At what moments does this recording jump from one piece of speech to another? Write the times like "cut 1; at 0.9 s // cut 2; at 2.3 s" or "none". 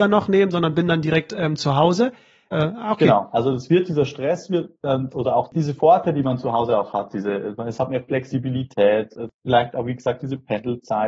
cut 1; at 2.5 s

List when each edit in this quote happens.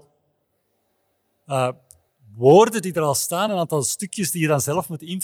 none

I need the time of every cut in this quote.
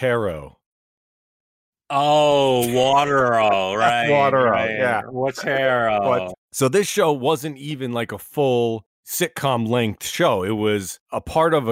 cut 1; at 6.3 s

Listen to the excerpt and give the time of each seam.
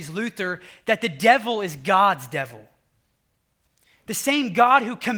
none

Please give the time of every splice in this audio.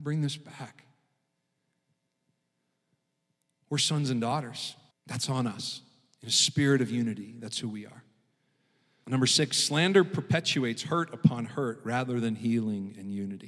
cut 1; at 4.9 s // cut 2; at 9.0 s

